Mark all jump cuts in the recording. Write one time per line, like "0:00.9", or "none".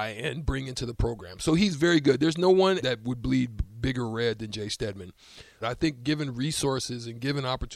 0:02.8
0:05.6